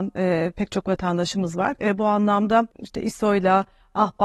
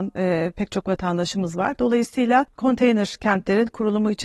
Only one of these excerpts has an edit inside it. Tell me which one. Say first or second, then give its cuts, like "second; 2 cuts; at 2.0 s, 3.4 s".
first; 1 cut; at 1.8 s